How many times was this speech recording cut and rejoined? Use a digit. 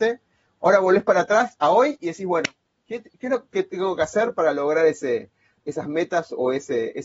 0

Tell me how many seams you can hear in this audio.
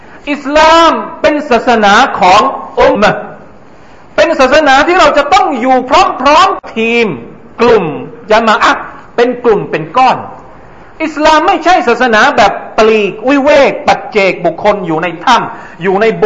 2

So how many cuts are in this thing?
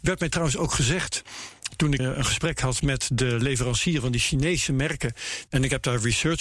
2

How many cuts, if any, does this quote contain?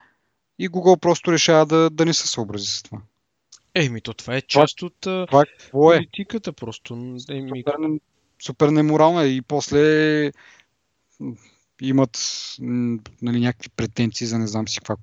0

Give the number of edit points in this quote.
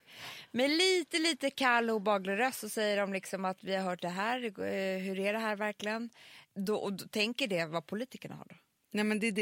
0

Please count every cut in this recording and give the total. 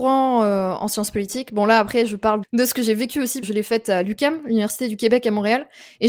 2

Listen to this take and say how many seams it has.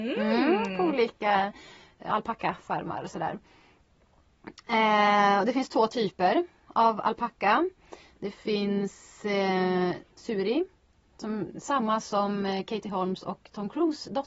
1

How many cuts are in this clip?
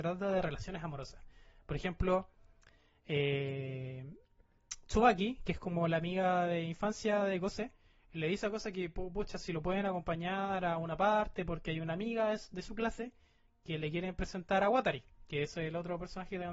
0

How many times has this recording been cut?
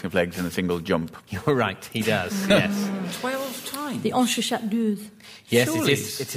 0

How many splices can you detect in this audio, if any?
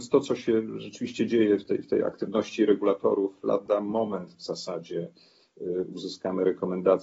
0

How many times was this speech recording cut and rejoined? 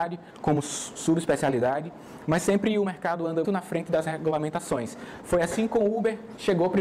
1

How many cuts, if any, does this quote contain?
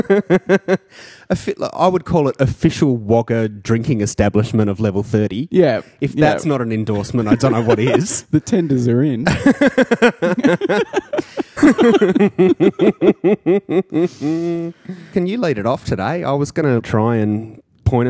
2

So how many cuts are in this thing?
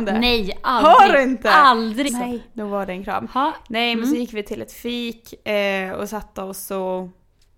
1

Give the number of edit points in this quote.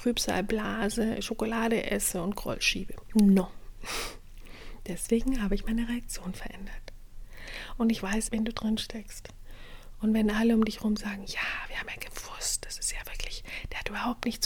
1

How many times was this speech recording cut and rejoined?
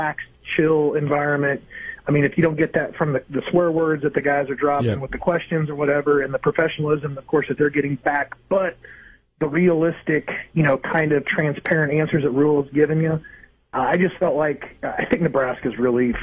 0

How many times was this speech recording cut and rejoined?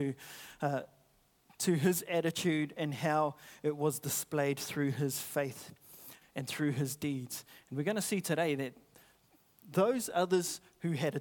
1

